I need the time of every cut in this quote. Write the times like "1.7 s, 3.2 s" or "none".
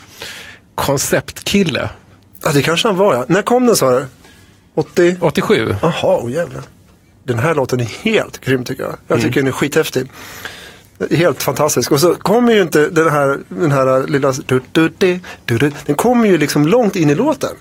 none